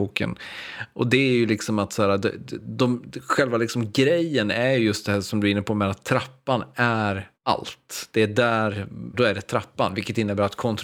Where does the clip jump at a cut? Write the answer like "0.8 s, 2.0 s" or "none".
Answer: 7.3 s, 9.1 s